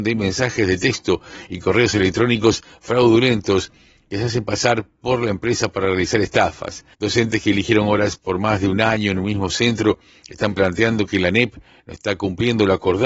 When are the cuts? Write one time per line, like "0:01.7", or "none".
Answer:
0:06.9